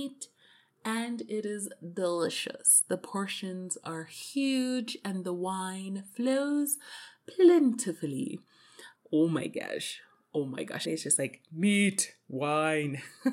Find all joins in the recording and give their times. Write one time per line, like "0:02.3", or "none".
0:09.0
0:10.8